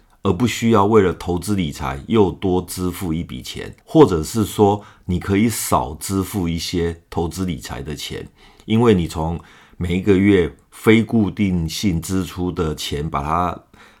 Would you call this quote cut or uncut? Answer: cut